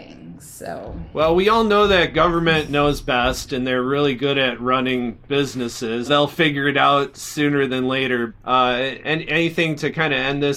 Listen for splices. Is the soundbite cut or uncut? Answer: cut